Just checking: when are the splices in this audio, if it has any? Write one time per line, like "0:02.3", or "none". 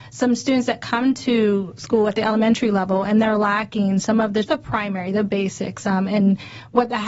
0:04.4